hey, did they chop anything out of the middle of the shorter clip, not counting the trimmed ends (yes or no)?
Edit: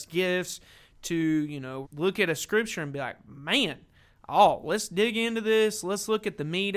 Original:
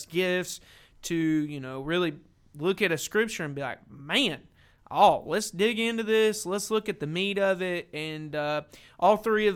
yes